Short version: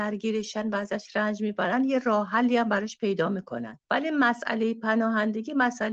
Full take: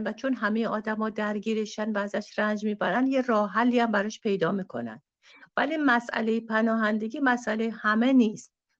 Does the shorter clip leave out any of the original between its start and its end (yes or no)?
yes